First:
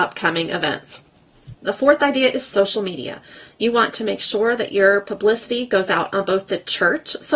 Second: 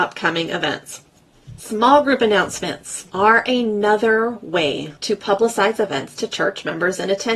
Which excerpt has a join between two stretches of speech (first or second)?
first